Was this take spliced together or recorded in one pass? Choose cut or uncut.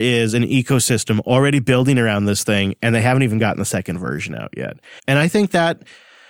cut